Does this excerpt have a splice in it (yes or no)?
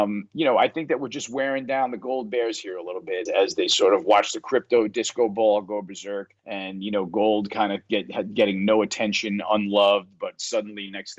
yes